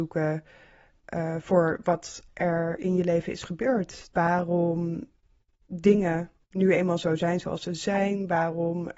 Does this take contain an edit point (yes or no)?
yes